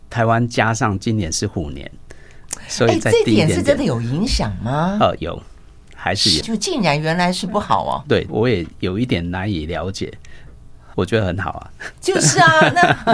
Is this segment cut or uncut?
cut